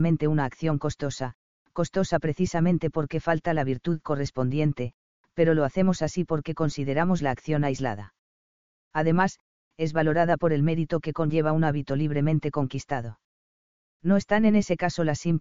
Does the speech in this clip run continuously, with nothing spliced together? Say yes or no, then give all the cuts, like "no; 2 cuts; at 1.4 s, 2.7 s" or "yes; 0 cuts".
no; 1 cut; at 8.8 s